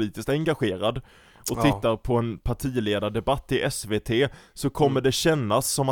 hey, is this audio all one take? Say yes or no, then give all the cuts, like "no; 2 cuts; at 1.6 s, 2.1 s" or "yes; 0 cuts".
yes; 0 cuts